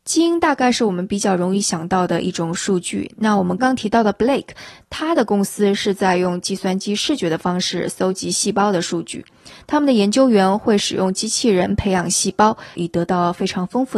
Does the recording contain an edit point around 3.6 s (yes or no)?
yes